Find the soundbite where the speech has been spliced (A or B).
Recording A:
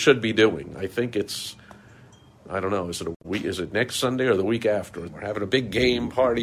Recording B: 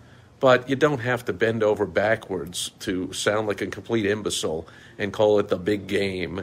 A